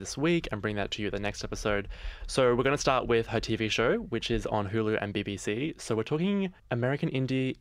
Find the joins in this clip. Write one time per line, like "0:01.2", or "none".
0:06.6